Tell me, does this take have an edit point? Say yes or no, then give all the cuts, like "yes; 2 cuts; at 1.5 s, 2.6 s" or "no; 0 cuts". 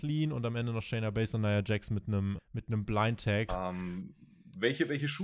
yes; 2 cuts; at 2.4 s, 3.5 s